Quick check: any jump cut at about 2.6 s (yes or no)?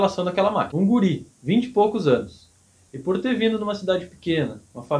no